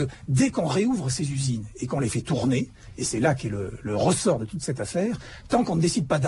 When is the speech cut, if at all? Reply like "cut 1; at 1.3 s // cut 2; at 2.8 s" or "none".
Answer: none